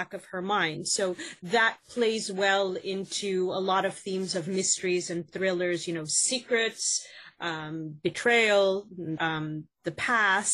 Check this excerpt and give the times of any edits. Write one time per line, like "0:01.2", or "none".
0:09.2